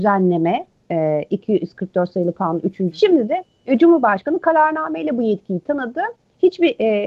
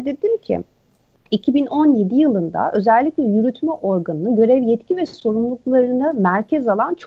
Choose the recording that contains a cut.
first; 1 cut; at 2.9 s

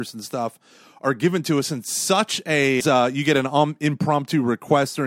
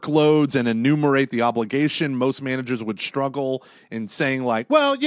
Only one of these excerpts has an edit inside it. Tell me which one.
first; 1 cut; at 2.8 s

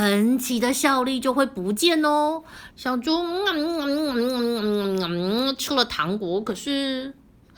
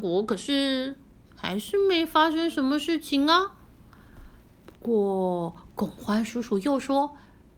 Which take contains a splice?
first; 1 cut; at 2.7 s

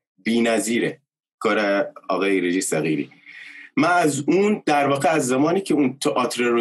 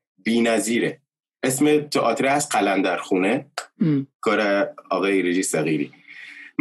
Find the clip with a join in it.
first; 1 cut; at 1.3 s

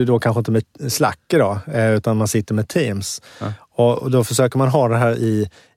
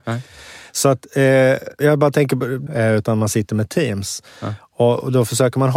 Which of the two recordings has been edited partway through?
second; 1 cut; at 2.7 s

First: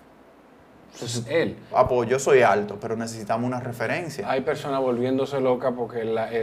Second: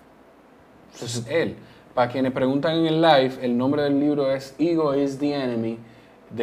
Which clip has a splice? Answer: first; 1 cut; at 1.7 s

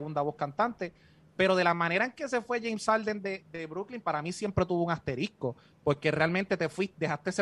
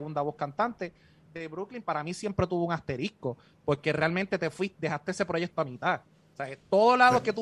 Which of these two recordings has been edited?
second; 1 cut; at 1.3 s

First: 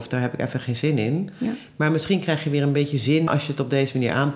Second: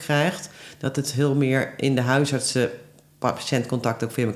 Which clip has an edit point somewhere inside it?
first; 1 cut; at 3.3 s

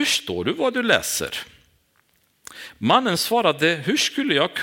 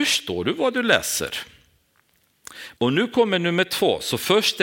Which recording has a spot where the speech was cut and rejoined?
second; 1 cut; at 2.8 s

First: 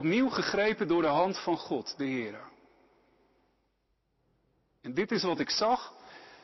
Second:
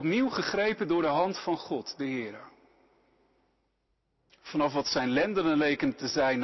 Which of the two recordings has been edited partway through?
second; 1 cut; at 4.3 s

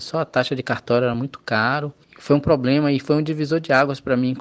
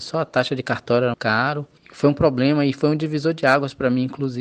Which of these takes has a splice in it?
second; 1 cut; at 1.1 s

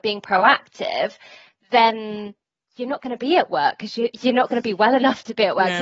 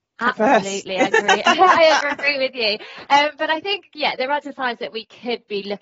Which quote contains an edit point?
second; 1 cut; at 4.4 s

